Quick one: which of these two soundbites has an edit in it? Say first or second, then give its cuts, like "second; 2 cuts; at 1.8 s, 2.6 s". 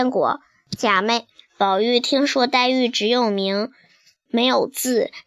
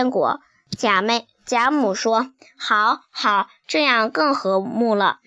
first; 1 cut; at 1.3 s